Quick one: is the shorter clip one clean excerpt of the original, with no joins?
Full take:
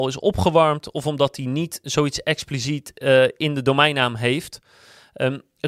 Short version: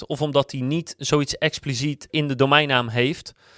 no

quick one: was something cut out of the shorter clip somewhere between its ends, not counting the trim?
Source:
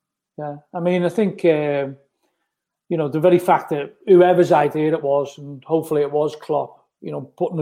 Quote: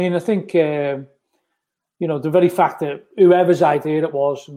no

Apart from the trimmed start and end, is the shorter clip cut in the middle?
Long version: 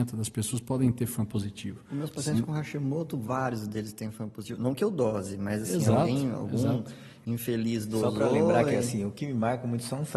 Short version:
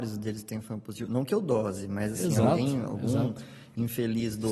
no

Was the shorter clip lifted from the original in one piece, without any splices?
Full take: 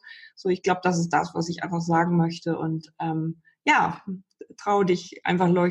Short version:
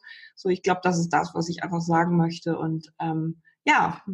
yes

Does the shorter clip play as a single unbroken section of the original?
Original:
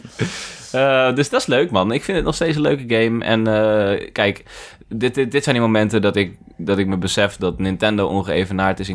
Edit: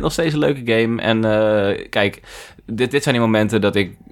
no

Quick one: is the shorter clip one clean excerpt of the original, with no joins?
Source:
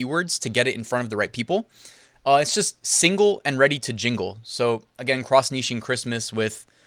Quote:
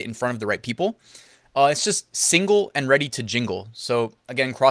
yes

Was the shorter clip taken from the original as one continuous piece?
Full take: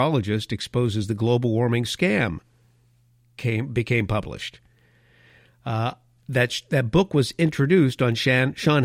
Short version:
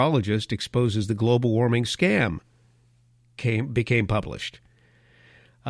yes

